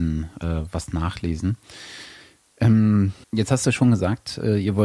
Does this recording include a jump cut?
yes; 1 cut; at 3.2 s

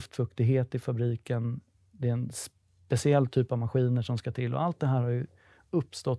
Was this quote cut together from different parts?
no; 0 cuts

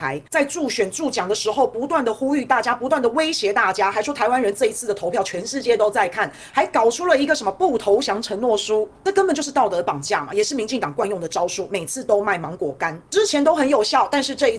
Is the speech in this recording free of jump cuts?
yes; 0 cuts

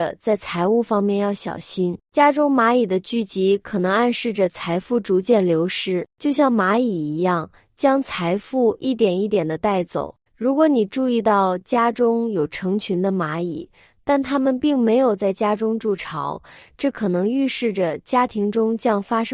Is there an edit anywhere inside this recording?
yes; 1 cut; at 10.3 s

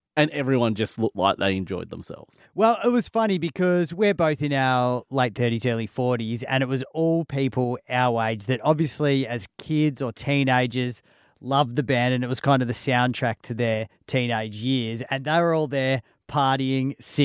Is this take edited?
no; 0 cuts

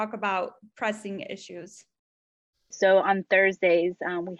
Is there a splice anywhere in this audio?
yes; 1 cut; at 2.5 s

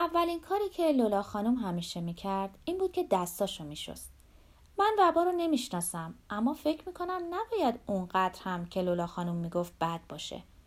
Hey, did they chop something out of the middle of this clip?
yes; 1 cut; at 4.7 s

